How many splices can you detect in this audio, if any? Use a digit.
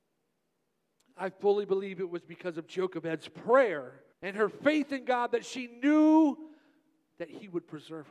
1